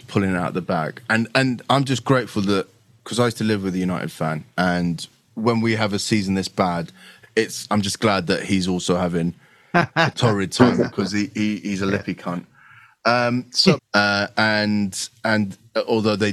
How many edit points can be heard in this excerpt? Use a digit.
2